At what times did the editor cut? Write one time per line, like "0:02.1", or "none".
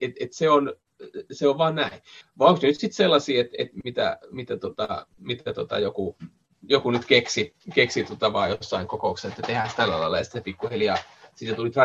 0:02.2
0:05.1

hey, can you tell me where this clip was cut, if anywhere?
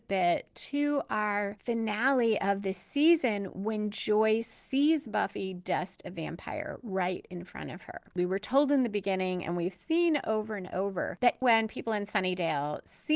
0:11.4

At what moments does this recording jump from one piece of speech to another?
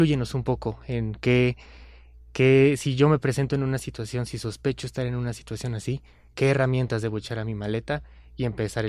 none

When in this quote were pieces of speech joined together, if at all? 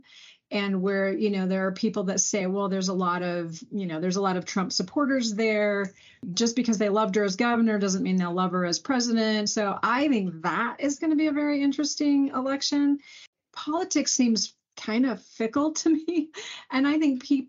none

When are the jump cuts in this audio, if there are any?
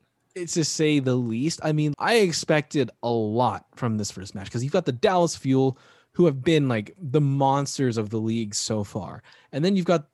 0:01.9

